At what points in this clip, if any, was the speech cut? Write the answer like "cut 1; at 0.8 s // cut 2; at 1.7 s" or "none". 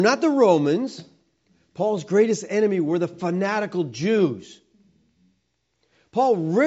none